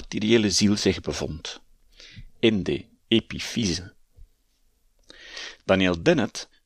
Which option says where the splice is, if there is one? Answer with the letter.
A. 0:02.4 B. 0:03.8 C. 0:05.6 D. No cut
C